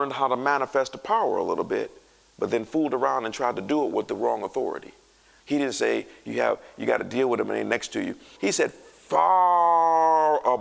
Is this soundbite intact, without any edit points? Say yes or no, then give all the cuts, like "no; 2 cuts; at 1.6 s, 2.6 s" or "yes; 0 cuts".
no; 2 cuts; at 5.4 s, 8.4 s